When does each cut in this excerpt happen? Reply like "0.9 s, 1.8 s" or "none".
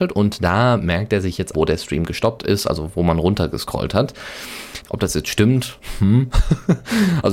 1.5 s, 4.8 s